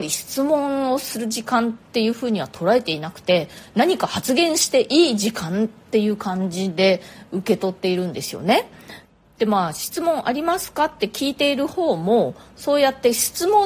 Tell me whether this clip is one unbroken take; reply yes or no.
yes